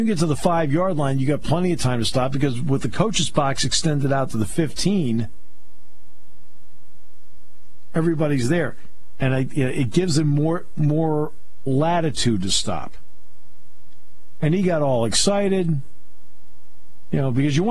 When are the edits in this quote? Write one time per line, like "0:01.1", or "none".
none